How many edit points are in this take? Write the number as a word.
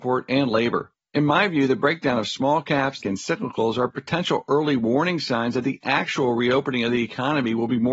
two